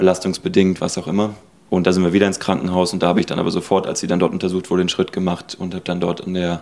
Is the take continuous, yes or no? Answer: no